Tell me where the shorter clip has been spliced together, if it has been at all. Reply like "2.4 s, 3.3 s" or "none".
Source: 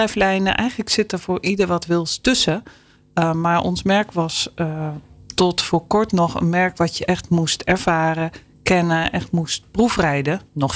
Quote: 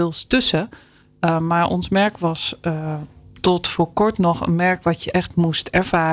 none